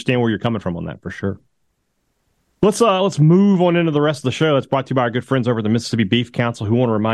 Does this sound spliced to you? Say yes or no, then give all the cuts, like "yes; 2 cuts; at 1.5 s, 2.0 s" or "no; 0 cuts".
no; 0 cuts